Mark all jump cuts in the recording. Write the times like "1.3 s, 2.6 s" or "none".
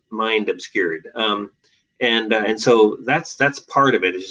none